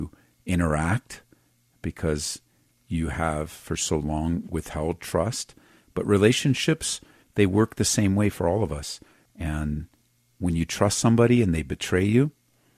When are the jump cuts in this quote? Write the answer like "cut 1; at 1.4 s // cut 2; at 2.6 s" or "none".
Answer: cut 1; at 9.3 s